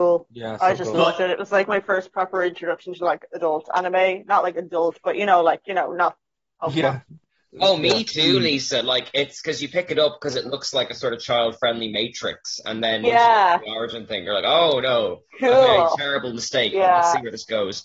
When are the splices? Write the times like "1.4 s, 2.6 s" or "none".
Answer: none